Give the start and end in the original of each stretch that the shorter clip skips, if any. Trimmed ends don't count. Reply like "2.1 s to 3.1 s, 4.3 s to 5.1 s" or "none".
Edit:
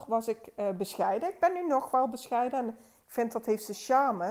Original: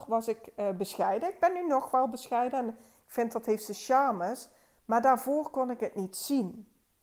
none